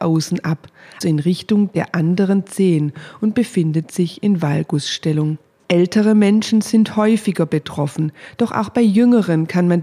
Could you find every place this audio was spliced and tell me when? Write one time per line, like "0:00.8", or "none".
0:01.0
0:05.6